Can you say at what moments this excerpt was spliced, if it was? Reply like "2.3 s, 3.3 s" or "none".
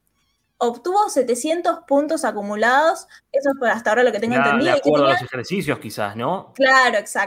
3.2 s